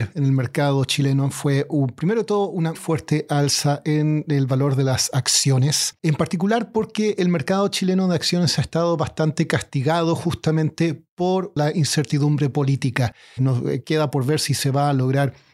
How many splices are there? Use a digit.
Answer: 2